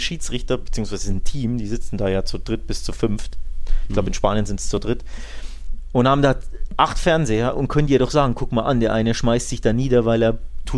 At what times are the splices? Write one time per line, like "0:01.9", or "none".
none

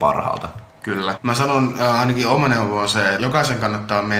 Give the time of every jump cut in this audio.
0:01.1
0:03.2

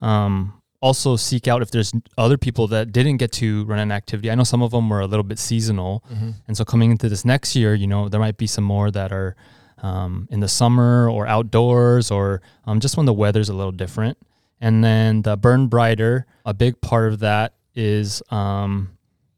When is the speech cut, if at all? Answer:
0:16.5

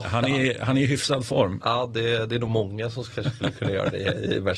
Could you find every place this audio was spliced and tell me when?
none

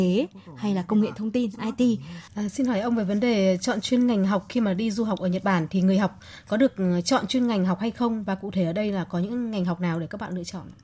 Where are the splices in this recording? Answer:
0:02.3

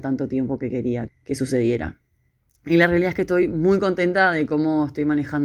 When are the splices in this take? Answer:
0:01.1

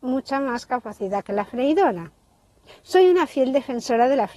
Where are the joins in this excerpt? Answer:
0:02.7

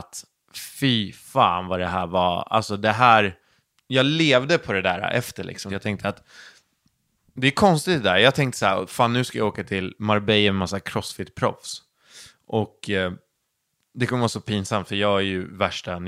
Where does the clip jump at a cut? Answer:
0:05.7

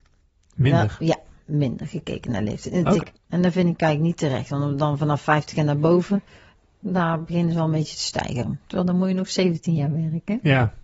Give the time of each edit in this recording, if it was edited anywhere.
0:03.0

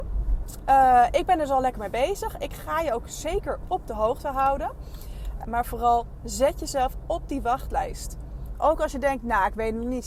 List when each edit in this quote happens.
0:05.4
0:08.5

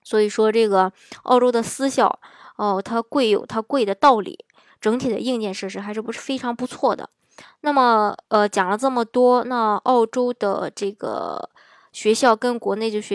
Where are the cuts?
none

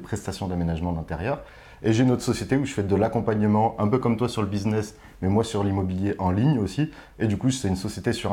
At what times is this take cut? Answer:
none

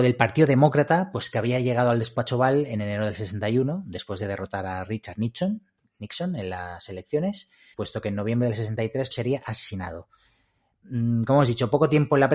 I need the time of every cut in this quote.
0:07.7
0:09.1

